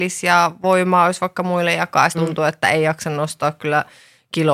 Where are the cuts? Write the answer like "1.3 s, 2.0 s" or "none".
2.1 s

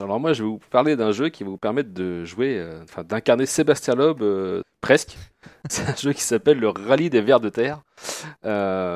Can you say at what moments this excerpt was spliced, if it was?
4.6 s, 5.7 s

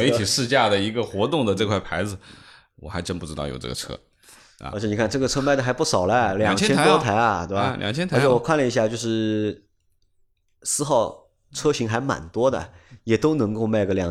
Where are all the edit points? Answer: none

